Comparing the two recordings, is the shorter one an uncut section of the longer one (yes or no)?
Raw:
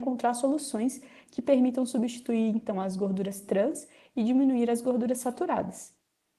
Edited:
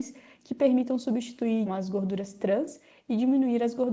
no